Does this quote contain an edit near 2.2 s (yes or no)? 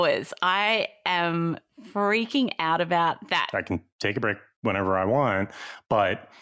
no